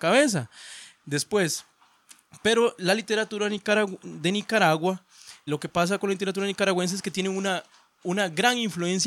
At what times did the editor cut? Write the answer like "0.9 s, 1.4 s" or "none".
5.5 s